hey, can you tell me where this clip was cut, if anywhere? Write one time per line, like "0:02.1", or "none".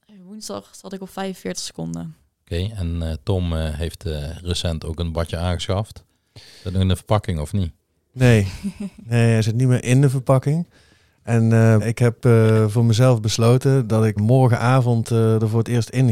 0:11.8
0:14.2